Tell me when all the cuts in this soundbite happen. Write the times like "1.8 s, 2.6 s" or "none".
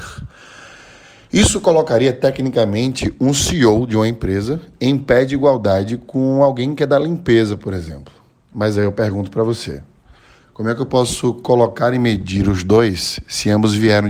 none